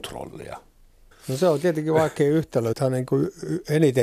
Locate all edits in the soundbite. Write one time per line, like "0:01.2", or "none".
0:01.1
0:02.7